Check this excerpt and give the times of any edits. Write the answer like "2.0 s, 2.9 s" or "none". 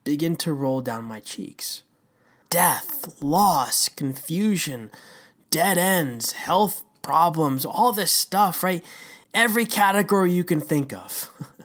2.4 s, 9.2 s